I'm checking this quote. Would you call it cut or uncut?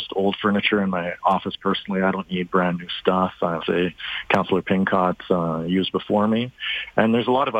cut